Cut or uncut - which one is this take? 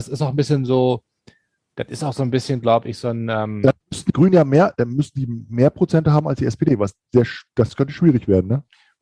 uncut